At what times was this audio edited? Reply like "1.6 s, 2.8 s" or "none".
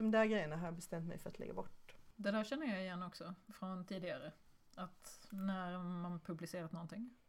none